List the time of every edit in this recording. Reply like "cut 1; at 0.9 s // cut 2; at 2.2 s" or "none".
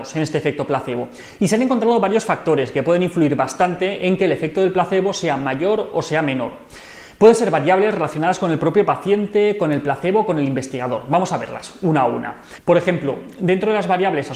none